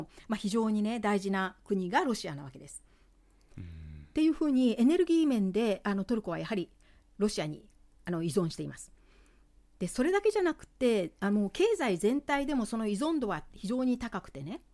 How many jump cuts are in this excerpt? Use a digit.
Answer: 1